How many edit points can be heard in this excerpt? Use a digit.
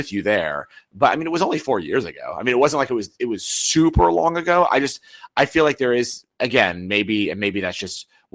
1